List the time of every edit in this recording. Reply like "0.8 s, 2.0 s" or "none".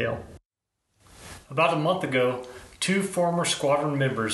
none

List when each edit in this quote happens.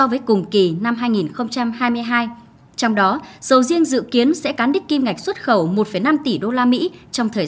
none

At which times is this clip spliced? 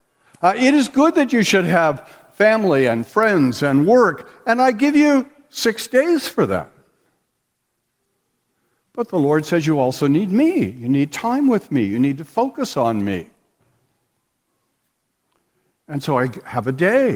none

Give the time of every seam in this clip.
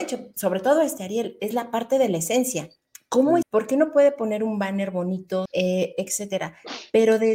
3.4 s, 5.5 s

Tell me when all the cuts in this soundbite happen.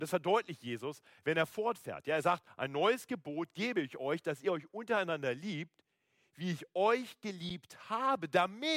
none

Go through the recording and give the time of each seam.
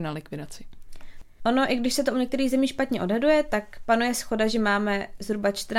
1.4 s

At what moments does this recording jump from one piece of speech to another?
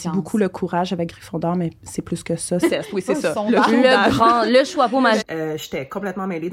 2.6 s, 5.2 s

